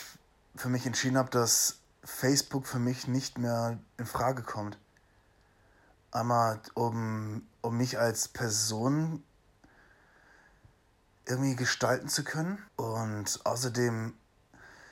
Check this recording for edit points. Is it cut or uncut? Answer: cut